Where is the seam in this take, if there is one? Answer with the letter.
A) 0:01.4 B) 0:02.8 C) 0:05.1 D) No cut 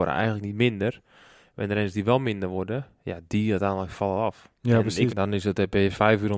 C